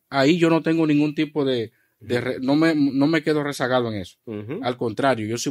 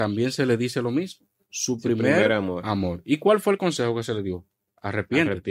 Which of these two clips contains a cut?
second; 1 cut; at 1.4 s

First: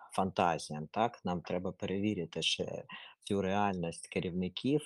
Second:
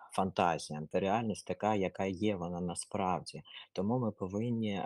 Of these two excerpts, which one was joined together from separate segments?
second; 1 cut; at 0.9 s

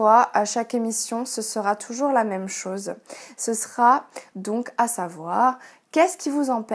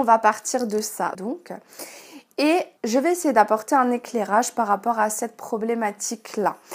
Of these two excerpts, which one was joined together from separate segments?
second; 2 cuts; at 1.1 s, 2.8 s

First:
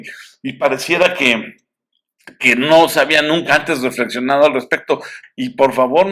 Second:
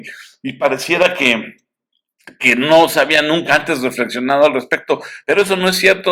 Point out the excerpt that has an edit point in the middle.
first; 1 cut; at 5.2 s

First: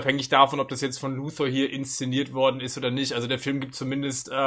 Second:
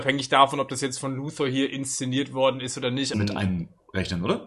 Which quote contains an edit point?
second; 1 cut; at 3.1 s

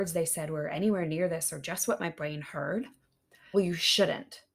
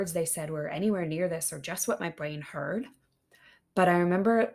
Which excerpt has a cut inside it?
first; 1 cut; at 3.5 s

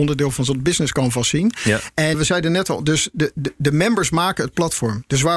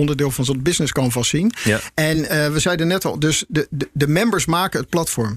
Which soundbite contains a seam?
first; 1 cut; at 2.1 s

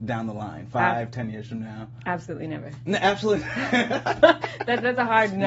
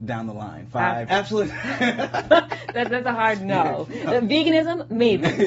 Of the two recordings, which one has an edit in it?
second; 1 cut; at 1.1 s

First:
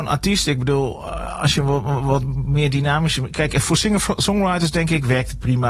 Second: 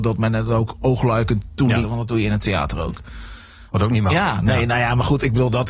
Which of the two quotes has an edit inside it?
second; 2 cuts; at 1.8 s, 3.7 s

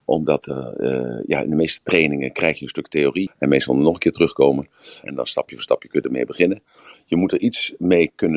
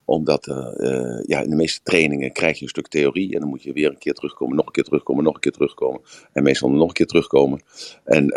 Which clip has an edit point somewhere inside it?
first; 3 cuts; at 3.3 s, 5.0 s, 6.9 s

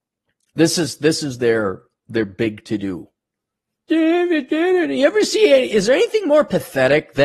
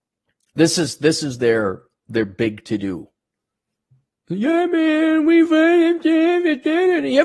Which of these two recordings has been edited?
first; 1 cut; at 3.9 s

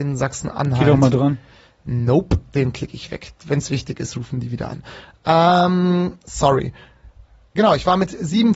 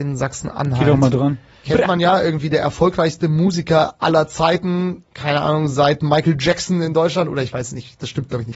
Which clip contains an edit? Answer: second; 1 cut; at 1.6 s

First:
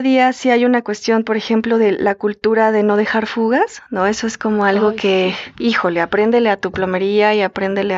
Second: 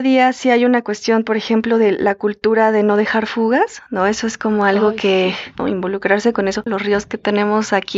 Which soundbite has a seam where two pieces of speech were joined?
second; 2 cuts; at 5.6 s, 6.7 s

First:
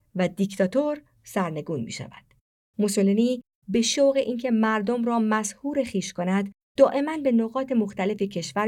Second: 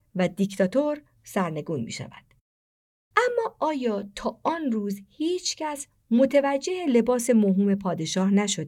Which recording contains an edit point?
first; 1 cut; at 2.7 s

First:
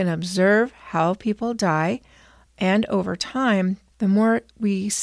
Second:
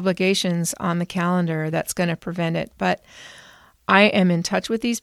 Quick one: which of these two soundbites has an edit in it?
first; 1 cut; at 3.9 s

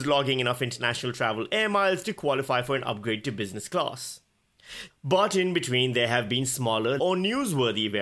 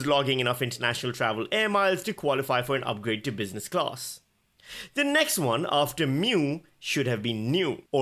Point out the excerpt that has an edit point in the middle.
first; 2 cuts; at 4.9 s, 7.0 s

